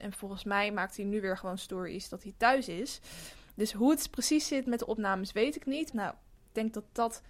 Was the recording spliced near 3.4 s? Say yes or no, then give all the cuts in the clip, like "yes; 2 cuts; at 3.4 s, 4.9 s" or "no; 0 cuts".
no; 1 cut; at 5.9 s